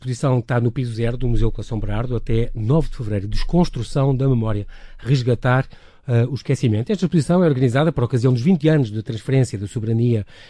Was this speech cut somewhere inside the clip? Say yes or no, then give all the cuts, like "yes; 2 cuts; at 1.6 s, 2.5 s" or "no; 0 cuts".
no; 0 cuts